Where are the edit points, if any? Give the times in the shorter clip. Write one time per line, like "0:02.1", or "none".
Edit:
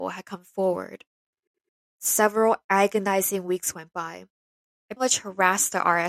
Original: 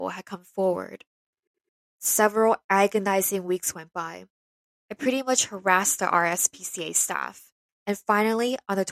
0:05.0